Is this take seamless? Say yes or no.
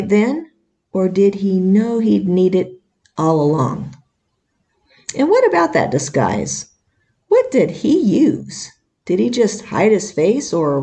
yes